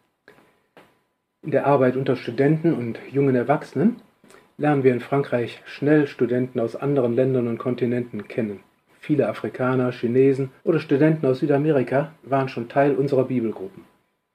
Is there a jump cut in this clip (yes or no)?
yes